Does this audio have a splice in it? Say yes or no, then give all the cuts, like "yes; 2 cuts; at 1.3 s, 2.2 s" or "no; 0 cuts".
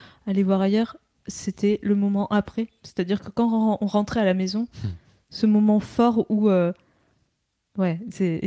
no; 0 cuts